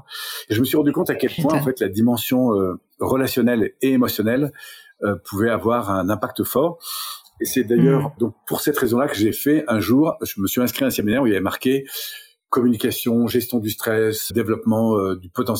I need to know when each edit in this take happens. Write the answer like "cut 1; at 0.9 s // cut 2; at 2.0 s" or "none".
cut 1; at 8.2 s // cut 2; at 14.3 s